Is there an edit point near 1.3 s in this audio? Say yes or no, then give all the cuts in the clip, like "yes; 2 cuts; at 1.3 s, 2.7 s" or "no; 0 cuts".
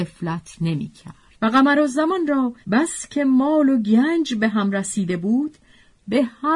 yes; 2 cuts; at 1.3 s, 2.6 s